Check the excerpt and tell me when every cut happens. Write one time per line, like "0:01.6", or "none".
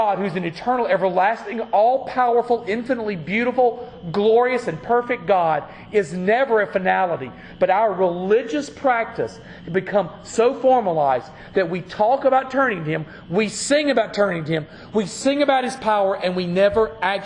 none